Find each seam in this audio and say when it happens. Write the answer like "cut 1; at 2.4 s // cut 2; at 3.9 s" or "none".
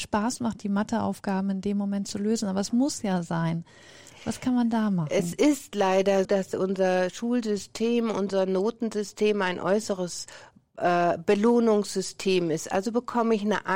cut 1; at 6.2 s